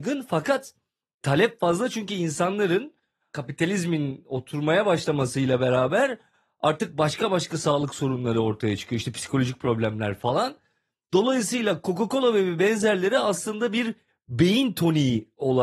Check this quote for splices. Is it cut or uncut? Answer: uncut